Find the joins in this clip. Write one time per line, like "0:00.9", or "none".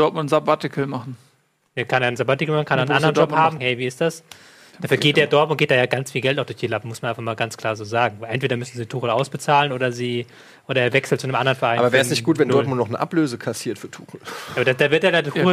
0:03.6